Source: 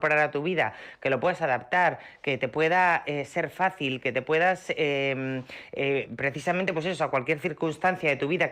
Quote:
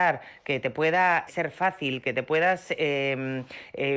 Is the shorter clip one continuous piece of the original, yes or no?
no